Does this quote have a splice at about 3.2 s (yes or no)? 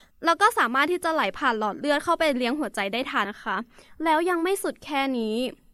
yes